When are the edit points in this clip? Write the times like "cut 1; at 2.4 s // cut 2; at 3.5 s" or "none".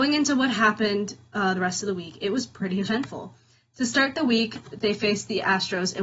none